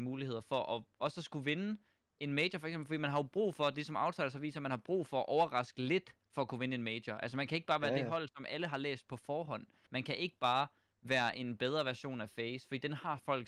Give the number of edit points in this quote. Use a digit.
1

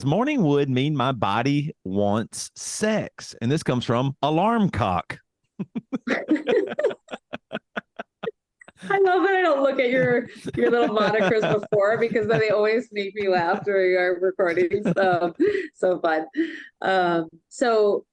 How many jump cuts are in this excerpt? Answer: 0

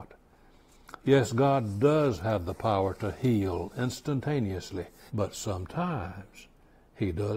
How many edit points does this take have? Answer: 1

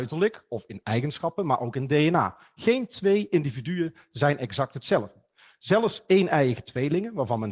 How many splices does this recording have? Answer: 0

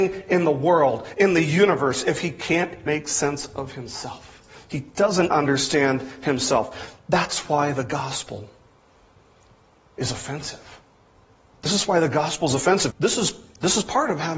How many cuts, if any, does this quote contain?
3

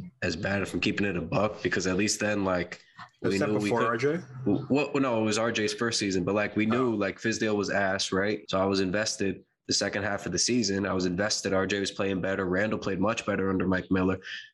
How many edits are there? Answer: 1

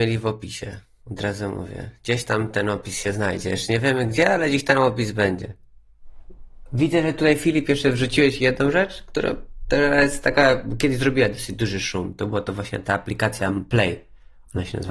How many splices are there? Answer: 0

